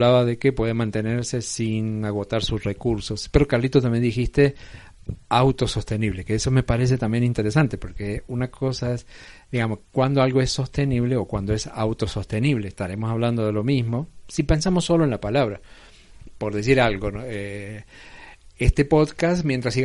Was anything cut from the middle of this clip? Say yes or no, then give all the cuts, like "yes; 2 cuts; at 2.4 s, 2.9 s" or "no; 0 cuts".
no; 0 cuts